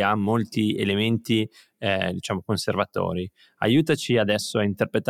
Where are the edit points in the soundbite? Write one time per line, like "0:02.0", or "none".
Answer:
none